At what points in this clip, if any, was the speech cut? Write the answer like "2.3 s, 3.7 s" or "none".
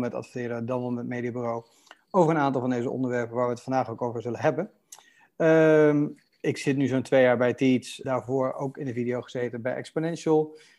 8.0 s